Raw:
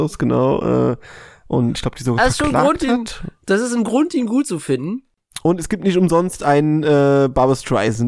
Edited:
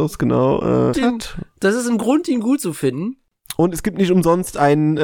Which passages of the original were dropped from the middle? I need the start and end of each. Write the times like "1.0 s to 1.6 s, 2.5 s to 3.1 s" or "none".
0.9 s to 2.8 s